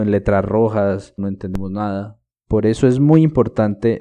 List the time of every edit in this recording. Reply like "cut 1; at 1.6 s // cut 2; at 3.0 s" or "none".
cut 1; at 1.2 s // cut 2; at 2.3 s

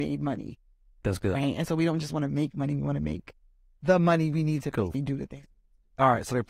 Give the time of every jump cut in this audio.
cut 1; at 4.9 s

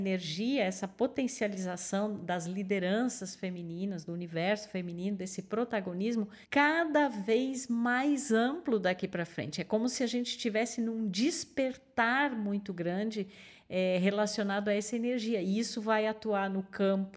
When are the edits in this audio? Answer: cut 1; at 6.4 s

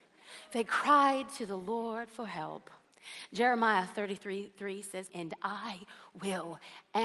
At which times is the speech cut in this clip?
cut 1; at 5.1 s

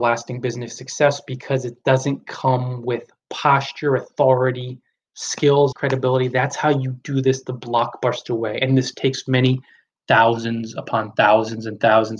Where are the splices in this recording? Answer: cut 1; at 5.7 s

